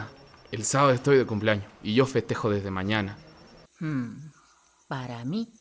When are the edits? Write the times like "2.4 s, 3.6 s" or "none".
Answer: 3.7 s